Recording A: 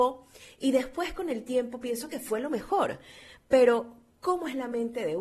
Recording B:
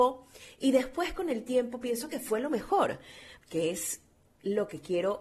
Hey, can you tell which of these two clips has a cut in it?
B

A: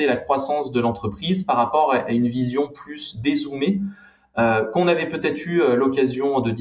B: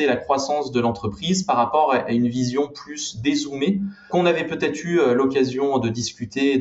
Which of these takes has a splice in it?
B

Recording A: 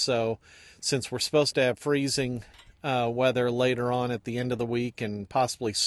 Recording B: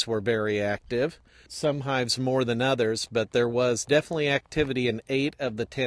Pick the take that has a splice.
B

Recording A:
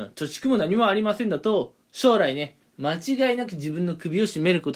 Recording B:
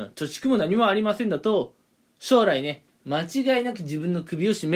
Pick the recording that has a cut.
A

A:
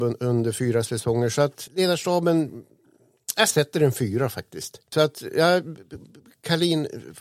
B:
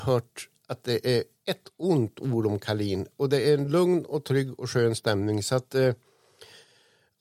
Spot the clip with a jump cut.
A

